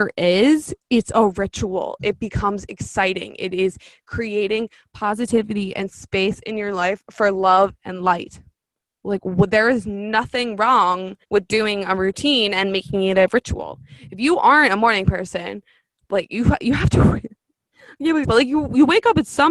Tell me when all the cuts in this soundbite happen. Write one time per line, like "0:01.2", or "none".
0:11.2
0:18.2